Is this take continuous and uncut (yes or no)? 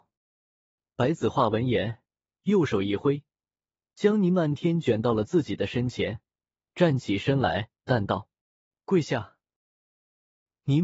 no